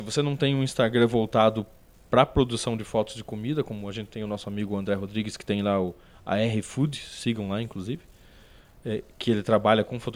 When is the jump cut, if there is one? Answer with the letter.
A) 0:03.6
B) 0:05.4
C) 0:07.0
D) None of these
D